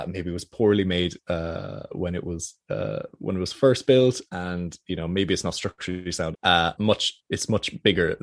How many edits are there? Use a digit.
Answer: 1